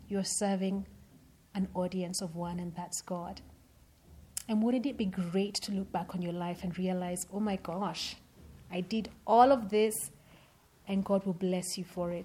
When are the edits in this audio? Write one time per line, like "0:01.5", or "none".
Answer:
none